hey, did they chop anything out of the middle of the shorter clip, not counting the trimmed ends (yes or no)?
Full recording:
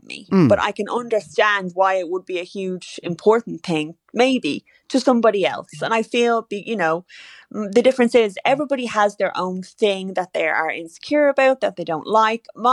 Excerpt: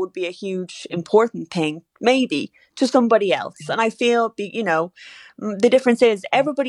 no